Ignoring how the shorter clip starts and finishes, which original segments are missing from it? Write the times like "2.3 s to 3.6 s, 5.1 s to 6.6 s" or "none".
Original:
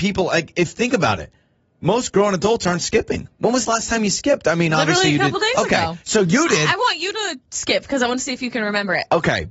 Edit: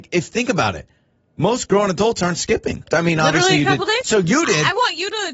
3.3 s to 4.4 s, 5.5 s to 6.0 s